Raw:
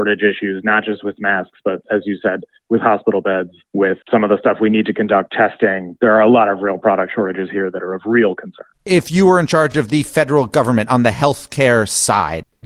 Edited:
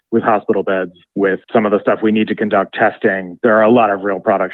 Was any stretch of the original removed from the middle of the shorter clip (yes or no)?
no